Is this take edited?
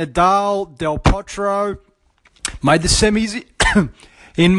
no; 0 cuts

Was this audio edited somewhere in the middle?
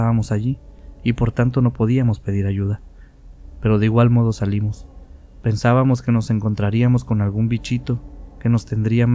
no; 0 cuts

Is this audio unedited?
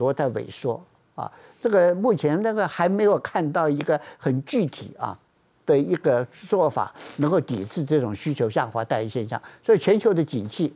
yes; 0 cuts

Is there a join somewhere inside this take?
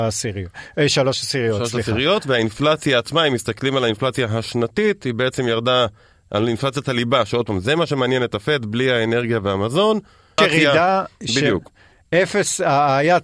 yes; 1 cut; at 10.4 s

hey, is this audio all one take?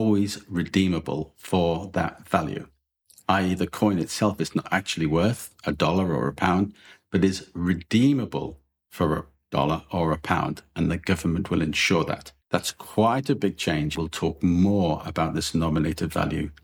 no; 2 cuts; at 12.4 s, 13.9 s

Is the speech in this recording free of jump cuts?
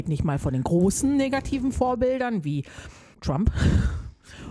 no; 1 cut; at 3.1 s

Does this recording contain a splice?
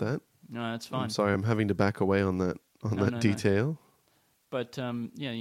no; 0 cuts

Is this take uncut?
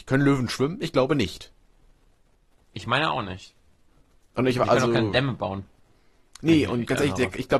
yes; 0 cuts

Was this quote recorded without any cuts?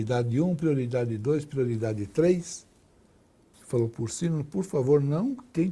no; 1 cut; at 3.5 s

